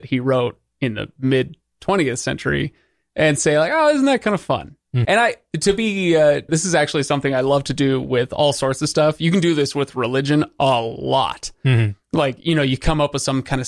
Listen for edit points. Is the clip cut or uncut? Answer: cut